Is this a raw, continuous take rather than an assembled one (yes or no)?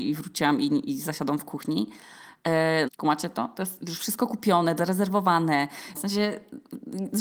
no